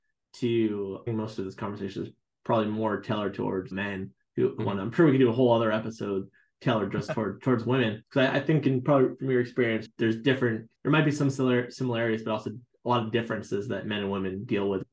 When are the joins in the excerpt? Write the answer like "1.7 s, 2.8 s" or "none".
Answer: 10.8 s